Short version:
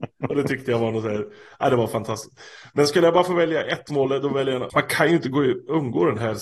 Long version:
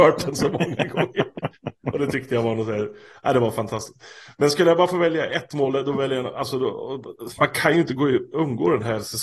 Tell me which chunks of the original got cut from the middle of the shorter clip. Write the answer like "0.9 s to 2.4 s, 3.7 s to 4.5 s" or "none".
6.3 s to 7.3 s